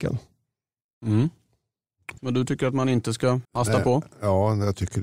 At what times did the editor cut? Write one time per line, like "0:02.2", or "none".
0:02.2
0:03.4